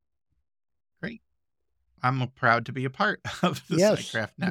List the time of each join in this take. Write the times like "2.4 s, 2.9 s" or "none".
2.0 s